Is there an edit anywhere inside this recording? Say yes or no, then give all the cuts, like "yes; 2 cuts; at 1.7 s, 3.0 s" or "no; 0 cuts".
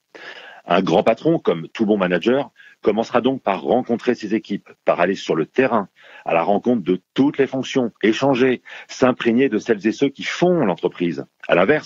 yes; 1 cut; at 8.0 s